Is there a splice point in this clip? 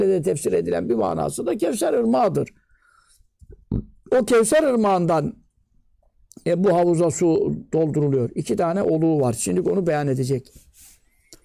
no; 0 cuts

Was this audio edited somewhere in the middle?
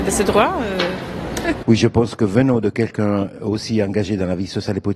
yes; 1 cut; at 1.6 s

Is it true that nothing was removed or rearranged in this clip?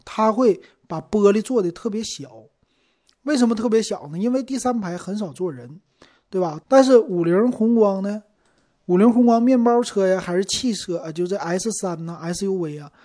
no; 1 cut; at 6.6 s

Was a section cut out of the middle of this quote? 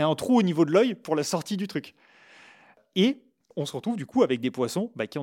no; 0 cuts

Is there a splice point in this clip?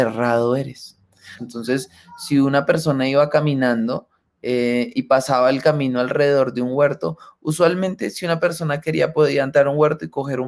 yes; 1 cut; at 1.4 s

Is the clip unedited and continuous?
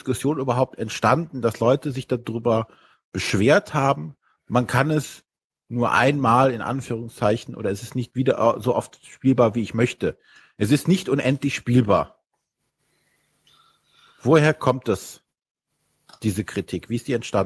yes; 0 cuts

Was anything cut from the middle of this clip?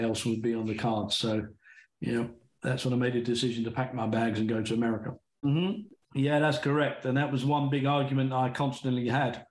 yes; 1 cut; at 5.4 s

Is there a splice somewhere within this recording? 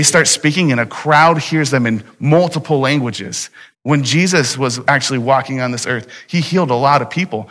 yes; 1 cut; at 3.7 s

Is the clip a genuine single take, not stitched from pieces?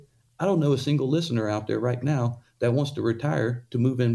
yes; 0 cuts

